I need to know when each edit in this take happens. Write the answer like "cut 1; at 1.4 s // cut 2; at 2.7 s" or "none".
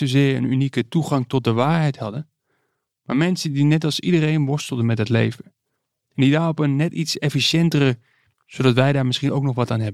cut 1; at 8.3 s

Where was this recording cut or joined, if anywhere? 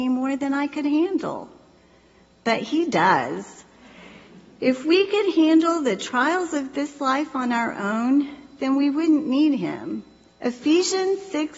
cut 1; at 10.3 s

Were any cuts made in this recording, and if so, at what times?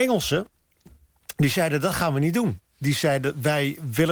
none

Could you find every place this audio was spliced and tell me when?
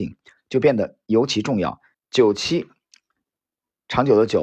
cut 1; at 1.9 s

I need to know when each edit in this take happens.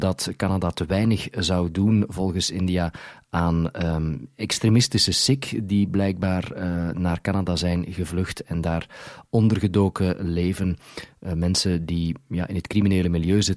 none

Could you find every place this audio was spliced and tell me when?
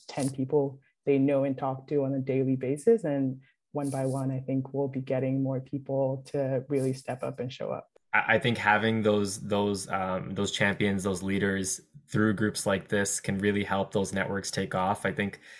none

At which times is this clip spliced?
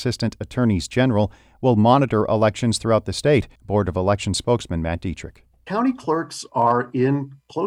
cut 1; at 3.6 s

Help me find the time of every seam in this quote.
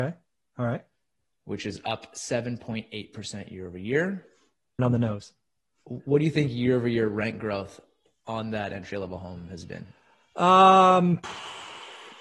cut 1; at 4.8 s

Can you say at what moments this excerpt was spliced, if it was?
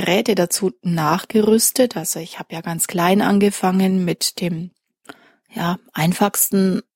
none

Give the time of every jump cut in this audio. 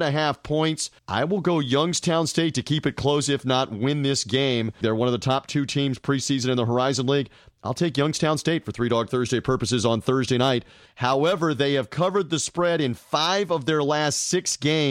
cut 1; at 1.0 s // cut 2; at 4.8 s // cut 3; at 10.9 s

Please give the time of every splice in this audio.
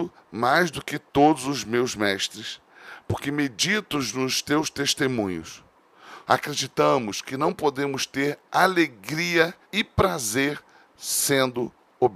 cut 1; at 6.2 s // cut 2; at 9.6 s

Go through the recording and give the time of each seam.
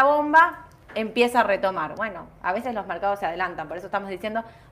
none

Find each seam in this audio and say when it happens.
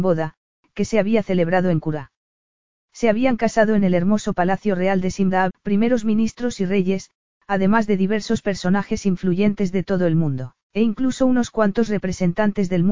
cut 1; at 5.5 s // cut 2; at 10.6 s

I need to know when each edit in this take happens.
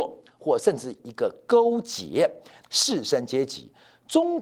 cut 1; at 2.6 s

